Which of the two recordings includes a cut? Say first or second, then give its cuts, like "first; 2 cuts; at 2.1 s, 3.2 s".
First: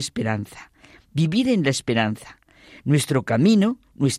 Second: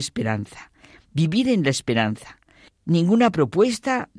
second; 1 cut; at 2.7 s